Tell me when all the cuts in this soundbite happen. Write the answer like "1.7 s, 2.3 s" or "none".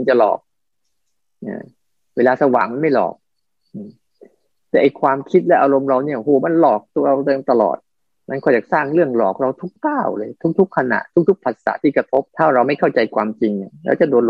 9.8 s, 12.3 s